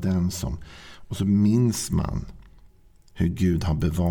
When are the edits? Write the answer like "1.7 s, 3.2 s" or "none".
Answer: none

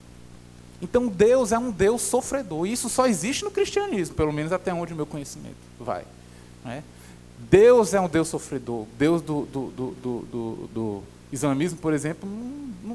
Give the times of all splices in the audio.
none

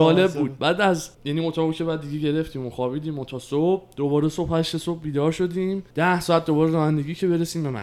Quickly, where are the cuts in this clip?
1.1 s, 5.9 s

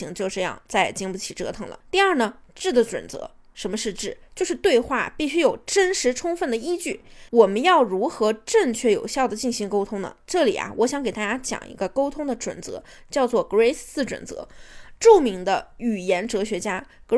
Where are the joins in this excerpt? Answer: 1.8 s, 7.3 s

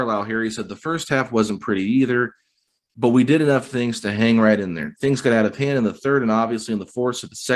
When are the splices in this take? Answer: none

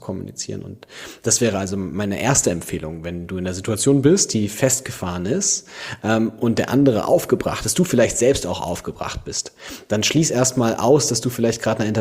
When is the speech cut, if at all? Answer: none

